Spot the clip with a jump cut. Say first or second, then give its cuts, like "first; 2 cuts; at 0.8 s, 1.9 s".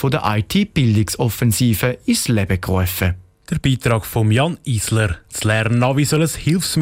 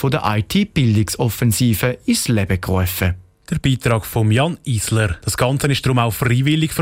second; 1 cut; at 5.2 s